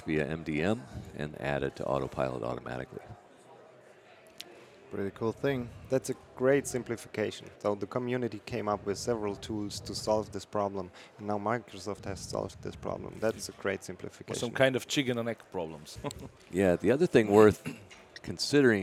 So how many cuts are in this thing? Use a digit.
3